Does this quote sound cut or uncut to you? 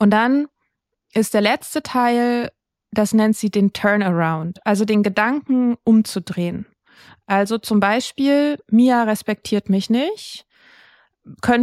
uncut